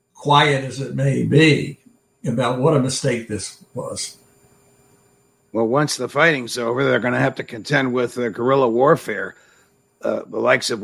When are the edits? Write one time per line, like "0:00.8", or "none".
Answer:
none

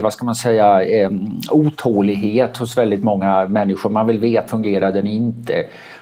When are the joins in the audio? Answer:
0:04.5

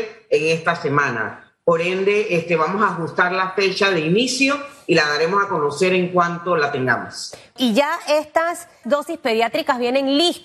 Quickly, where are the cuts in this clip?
0:07.6
0:08.8

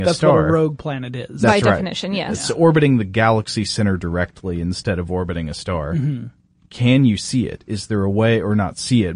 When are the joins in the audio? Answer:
none

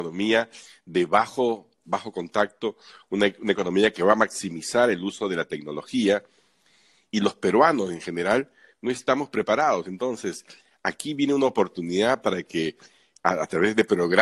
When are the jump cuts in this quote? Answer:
none

